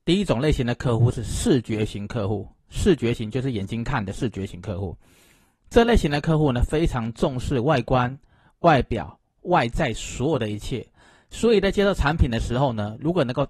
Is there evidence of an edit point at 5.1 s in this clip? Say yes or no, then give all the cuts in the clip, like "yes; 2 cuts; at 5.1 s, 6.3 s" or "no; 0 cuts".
no; 0 cuts